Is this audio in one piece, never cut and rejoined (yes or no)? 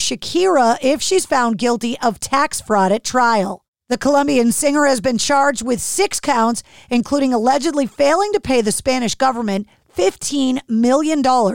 yes